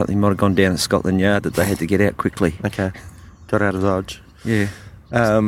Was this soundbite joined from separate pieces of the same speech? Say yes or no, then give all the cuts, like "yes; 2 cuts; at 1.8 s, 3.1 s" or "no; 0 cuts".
no; 0 cuts